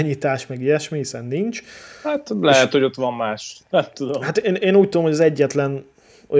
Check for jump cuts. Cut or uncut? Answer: uncut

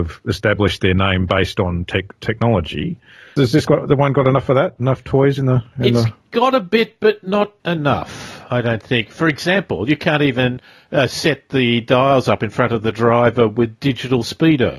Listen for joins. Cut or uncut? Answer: cut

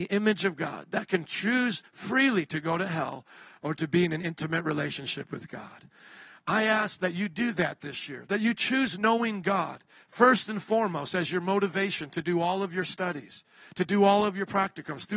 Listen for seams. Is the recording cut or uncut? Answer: uncut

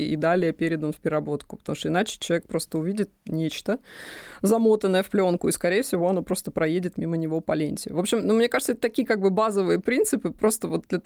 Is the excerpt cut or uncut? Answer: uncut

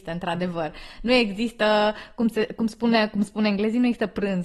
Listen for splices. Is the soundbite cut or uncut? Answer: uncut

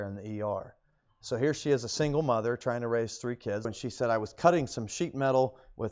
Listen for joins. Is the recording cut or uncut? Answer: cut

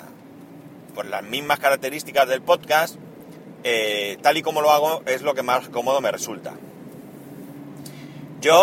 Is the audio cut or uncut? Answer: uncut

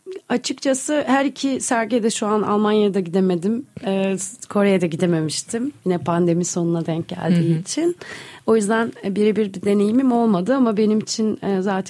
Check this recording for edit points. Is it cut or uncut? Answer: uncut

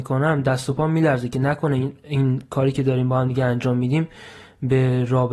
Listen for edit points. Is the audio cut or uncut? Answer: uncut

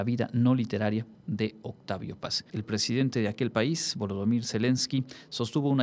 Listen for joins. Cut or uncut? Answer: cut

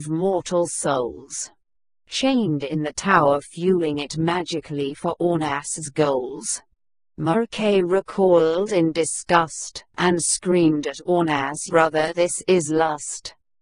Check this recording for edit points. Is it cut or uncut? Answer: cut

